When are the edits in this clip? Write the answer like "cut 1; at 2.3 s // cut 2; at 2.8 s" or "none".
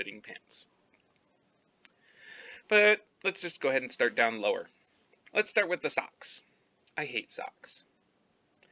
none